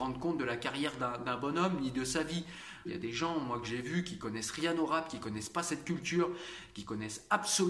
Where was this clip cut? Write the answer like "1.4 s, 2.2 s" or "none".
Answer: 2.9 s